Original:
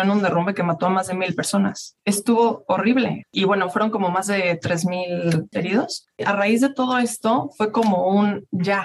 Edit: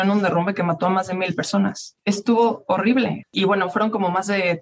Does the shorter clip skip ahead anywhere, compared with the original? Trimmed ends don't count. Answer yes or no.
no